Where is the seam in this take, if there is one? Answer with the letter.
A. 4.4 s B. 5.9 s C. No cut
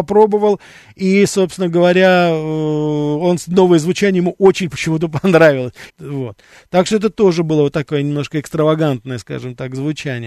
B